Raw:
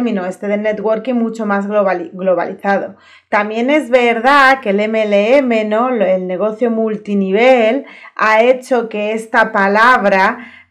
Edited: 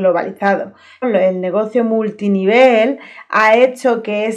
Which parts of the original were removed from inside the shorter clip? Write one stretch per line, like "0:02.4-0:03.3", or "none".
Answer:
0:03.2-0:05.9